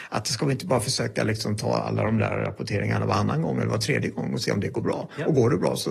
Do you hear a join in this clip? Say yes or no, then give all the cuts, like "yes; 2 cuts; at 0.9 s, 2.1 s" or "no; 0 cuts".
no; 0 cuts